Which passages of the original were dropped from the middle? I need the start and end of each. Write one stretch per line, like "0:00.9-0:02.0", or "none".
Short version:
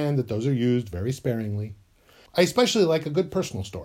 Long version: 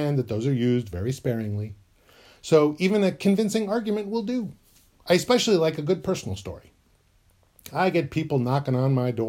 0:02.3-0:05.0